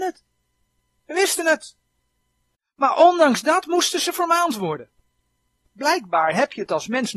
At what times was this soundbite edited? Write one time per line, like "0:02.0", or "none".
none